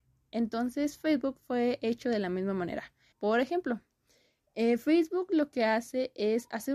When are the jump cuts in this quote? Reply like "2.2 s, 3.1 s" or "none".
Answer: 3.1 s